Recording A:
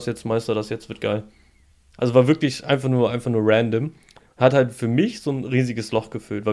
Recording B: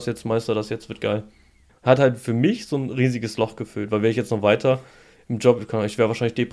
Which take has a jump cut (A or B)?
B